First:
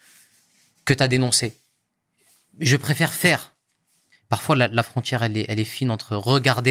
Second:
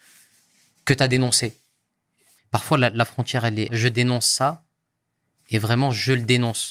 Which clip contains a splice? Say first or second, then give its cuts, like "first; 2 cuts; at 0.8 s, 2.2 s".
second; 2 cuts; at 2.4 s, 3.7 s